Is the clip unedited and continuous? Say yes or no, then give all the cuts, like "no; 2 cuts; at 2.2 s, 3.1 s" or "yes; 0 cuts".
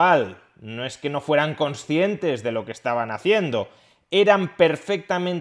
yes; 0 cuts